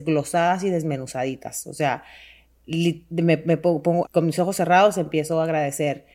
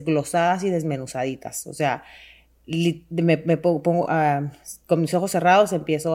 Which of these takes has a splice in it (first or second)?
first